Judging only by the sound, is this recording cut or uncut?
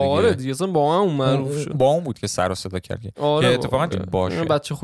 cut